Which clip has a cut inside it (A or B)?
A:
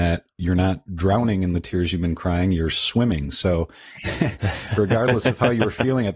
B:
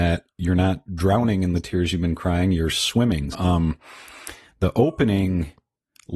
B